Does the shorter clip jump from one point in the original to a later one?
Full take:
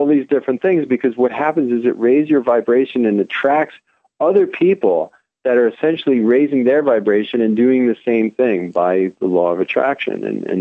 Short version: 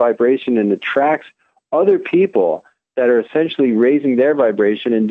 no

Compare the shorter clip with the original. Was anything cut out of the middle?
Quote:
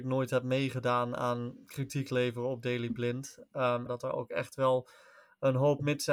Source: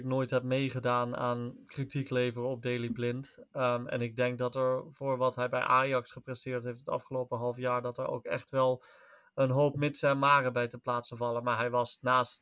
yes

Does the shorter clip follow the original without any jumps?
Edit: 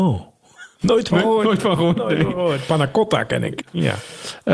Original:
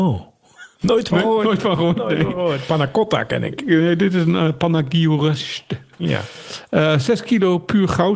no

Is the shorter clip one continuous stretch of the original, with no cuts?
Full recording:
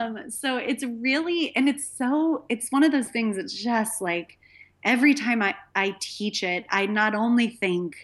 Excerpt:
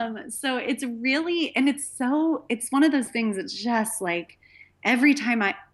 yes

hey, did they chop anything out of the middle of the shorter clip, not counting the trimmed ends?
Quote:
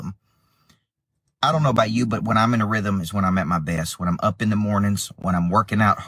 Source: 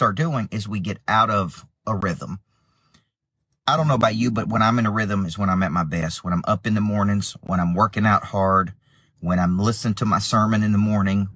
no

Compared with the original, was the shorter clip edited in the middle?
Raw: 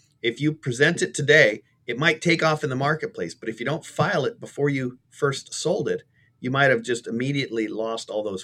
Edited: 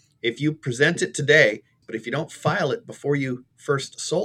yes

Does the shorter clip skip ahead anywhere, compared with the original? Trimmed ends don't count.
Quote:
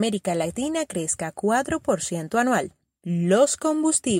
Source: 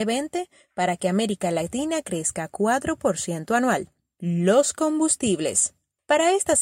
no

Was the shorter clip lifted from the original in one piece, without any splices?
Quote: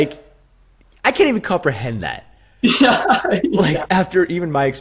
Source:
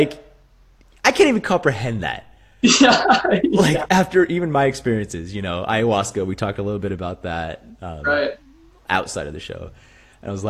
yes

